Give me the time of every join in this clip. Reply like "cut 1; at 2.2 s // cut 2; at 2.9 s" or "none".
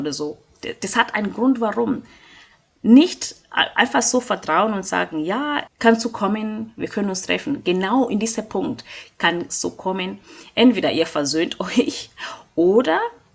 cut 1; at 5.7 s